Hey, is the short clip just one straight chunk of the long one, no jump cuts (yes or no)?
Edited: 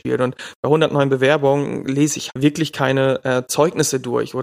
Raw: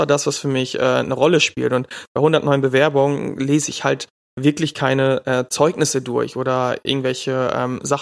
no